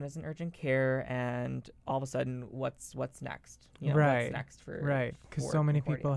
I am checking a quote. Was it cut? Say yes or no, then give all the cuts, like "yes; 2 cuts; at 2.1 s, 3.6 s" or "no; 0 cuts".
no; 0 cuts